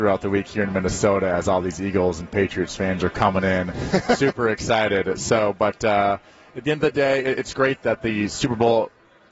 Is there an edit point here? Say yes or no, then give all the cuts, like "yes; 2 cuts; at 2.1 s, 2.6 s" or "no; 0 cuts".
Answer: no; 0 cuts